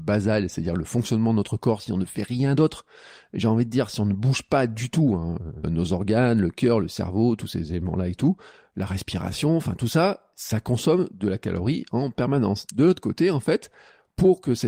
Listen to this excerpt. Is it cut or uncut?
cut